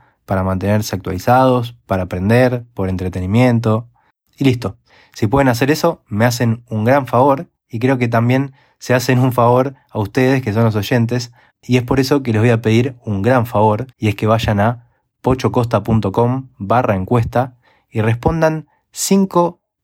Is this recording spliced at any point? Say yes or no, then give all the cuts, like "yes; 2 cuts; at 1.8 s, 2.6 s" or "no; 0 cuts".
yes; 3 cuts; at 4.3 s, 11.5 s, 13.9 s